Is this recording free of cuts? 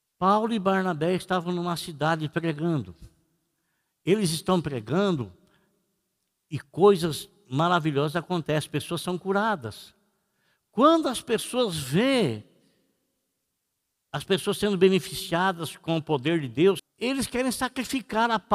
no; 1 cut; at 16.8 s

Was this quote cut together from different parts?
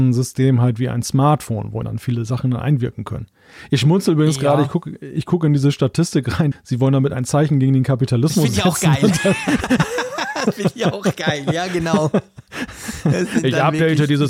yes; 2 cuts; at 1.8 s, 6.5 s

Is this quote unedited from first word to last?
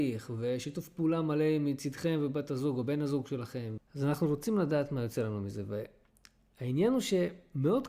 no; 1 cut; at 3.8 s

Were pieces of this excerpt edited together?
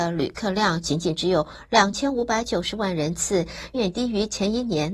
yes; 1 cut; at 3.7 s

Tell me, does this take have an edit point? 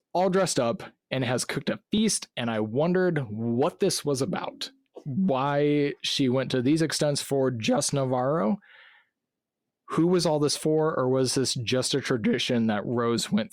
no; 0 cuts

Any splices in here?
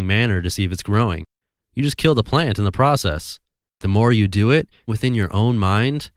yes; 2 cuts; at 3.7 s, 4.9 s

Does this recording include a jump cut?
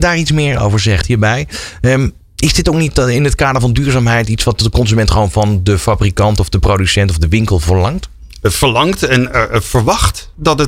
yes; 1 cut; at 1.0 s

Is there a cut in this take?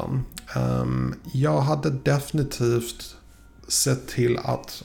no; 0 cuts

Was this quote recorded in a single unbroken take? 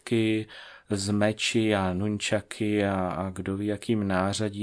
yes; 0 cuts

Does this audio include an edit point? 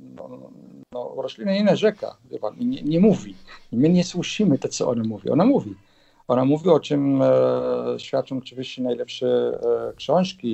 no; 0 cuts

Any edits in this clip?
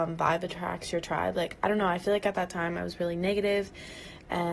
no; 0 cuts

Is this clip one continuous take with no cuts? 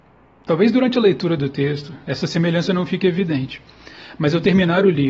yes; 0 cuts

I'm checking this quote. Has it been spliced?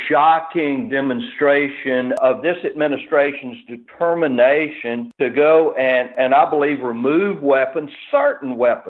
no; 0 cuts

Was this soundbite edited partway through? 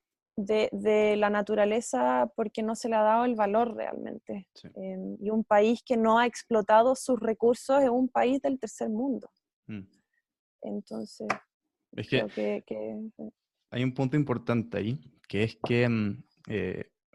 no; 0 cuts

